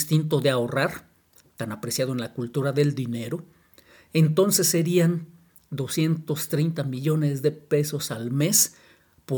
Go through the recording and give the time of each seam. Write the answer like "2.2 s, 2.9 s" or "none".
none